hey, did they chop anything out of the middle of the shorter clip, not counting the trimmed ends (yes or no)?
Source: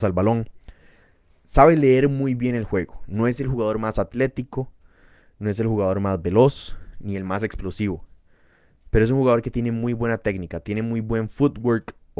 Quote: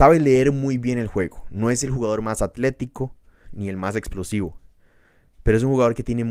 yes